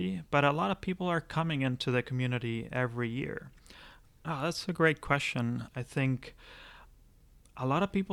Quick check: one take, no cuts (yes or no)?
no